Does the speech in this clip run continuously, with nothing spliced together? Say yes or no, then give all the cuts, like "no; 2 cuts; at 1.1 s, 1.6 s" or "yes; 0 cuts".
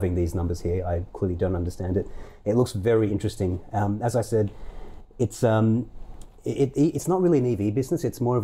yes; 0 cuts